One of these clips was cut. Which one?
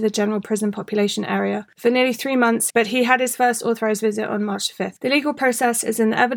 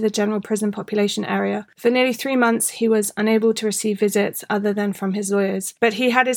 first; 1 cut; at 2.7 s

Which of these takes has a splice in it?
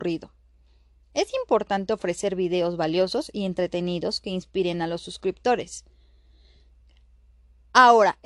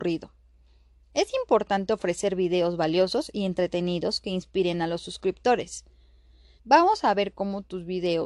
second; 1 cut; at 6.6 s

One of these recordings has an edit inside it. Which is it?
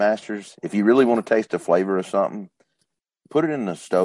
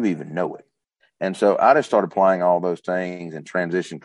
second; 1 cut; at 1.0 s

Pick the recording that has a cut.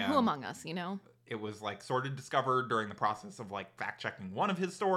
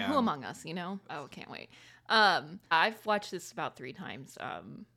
second; 2 cuts; at 1.1 s, 2.7 s

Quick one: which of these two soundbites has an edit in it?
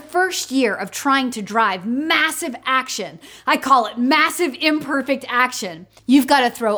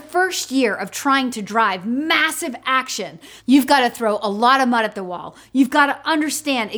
second; 1 cut; at 3.4 s

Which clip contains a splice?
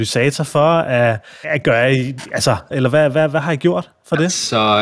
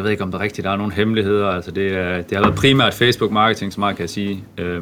first; 2 cuts; at 1.4 s, 2.7 s

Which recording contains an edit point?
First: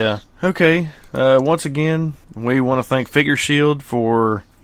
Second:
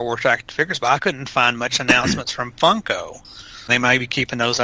second; 1 cut; at 3.7 s

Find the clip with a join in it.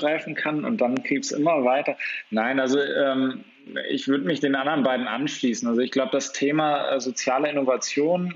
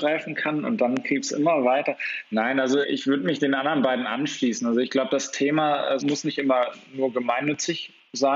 second; 2 cuts; at 2.8 s, 6.0 s

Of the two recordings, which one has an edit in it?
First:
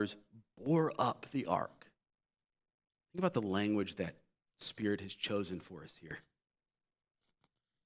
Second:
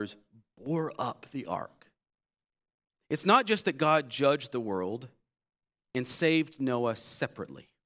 second; 1 cut; at 2.9 s

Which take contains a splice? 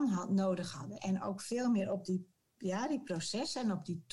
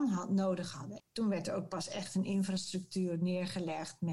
second; 1 cut; at 1.0 s

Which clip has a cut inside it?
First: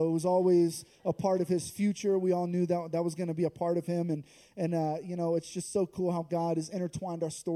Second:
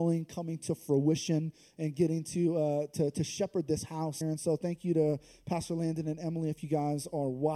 second; 1 cut; at 4.2 s

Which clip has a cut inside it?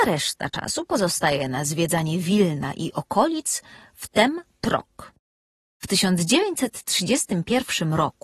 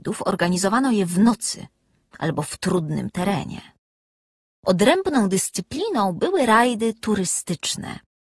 first; 1 cut; at 5.7 s

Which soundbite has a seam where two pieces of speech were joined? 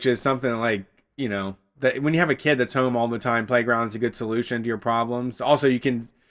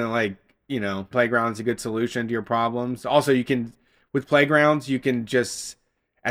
second; 1 cut; at 1.1 s

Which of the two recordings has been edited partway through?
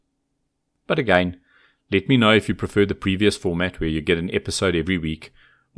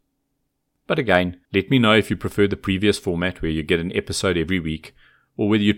second; 1 cut; at 1.4 s

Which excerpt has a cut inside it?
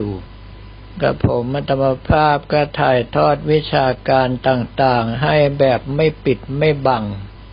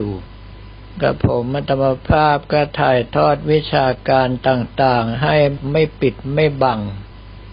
second; 1 cut; at 5.6 s

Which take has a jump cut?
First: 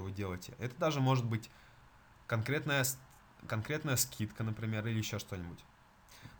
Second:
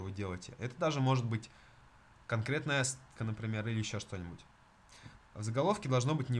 second; 2 cuts; at 3.2 s, 5.2 s

